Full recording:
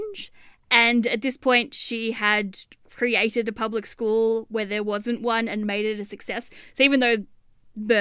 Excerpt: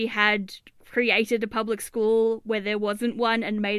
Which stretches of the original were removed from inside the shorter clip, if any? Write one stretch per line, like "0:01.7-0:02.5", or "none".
none